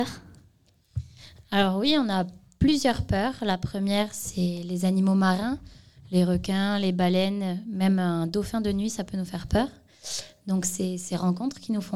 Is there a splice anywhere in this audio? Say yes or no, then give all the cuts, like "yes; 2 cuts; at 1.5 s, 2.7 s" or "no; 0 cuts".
no; 0 cuts